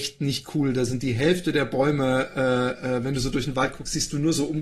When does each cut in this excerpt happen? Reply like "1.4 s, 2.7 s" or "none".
none